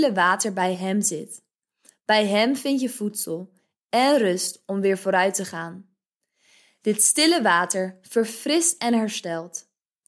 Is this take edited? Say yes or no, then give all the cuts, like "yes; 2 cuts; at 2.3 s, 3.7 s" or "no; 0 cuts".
no; 0 cuts